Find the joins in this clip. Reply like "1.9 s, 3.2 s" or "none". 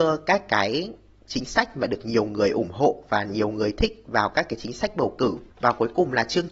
5.5 s